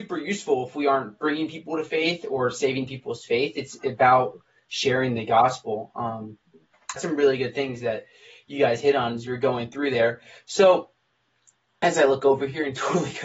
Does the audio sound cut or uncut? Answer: cut